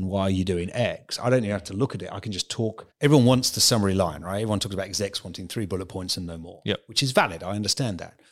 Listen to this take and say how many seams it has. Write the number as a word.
one